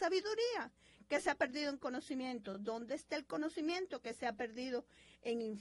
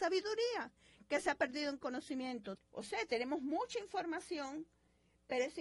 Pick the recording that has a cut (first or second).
second